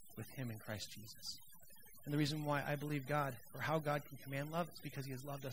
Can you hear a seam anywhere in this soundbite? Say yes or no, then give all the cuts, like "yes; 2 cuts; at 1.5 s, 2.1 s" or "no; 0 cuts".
no; 0 cuts